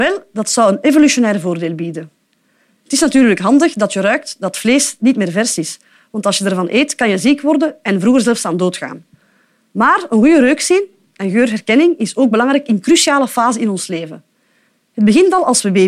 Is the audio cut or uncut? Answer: uncut